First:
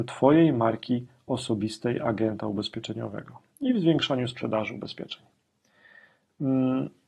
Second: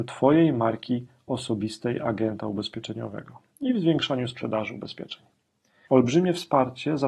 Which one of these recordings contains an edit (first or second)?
second